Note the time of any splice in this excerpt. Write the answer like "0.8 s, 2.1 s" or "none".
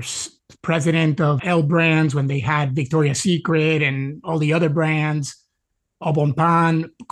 1.4 s